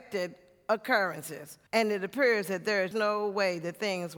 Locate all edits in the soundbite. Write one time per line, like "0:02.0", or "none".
0:01.7
0:02.9